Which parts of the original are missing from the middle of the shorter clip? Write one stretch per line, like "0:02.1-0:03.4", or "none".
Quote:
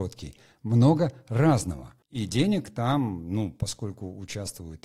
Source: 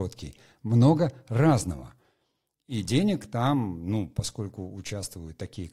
0:02.0-0:02.6

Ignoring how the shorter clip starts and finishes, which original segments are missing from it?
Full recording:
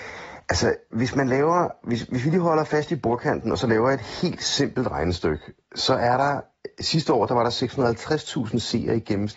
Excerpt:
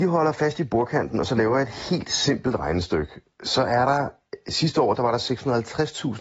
none

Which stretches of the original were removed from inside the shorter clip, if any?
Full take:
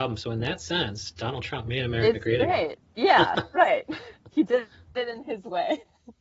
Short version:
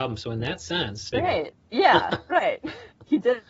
0:01.1-0:02.4

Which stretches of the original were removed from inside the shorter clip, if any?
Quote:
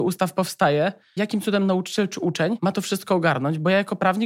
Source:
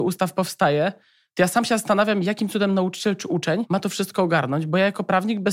0:01.2-0:02.2

